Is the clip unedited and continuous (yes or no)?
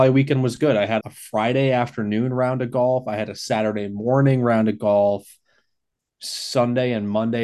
no